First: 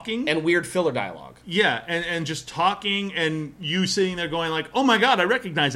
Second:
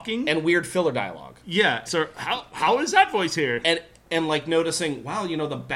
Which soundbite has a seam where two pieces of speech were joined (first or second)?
second